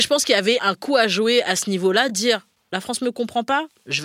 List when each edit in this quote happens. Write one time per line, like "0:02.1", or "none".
none